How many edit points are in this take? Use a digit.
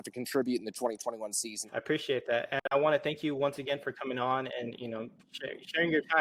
1